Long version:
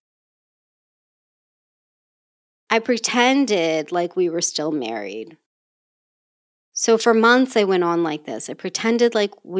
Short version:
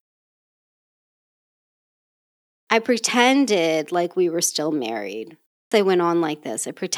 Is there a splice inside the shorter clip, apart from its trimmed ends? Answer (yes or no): yes